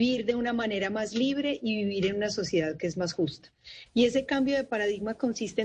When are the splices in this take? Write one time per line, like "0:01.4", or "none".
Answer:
0:03.9